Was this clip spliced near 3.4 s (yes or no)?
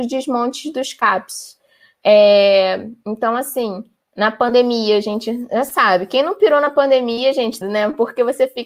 no